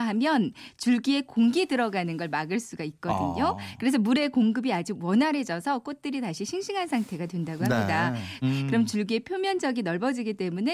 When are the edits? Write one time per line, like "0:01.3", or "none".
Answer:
0:08.4